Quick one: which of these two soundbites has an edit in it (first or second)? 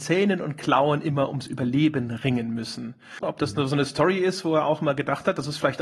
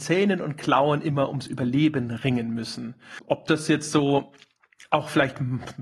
first